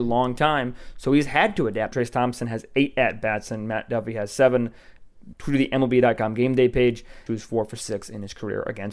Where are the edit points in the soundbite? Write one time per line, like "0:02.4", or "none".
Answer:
0:01.9
0:05.3
0:07.3